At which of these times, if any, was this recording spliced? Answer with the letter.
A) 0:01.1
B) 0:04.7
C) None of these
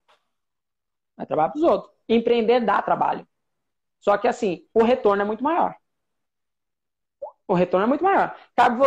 B